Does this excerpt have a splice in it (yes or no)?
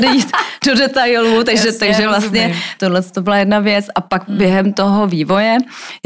no